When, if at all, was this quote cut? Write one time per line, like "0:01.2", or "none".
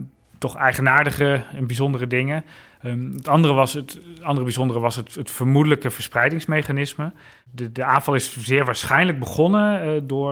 none